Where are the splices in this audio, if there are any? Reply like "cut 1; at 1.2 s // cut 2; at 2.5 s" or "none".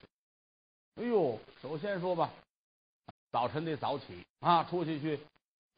cut 1; at 3.1 s // cut 2; at 4.3 s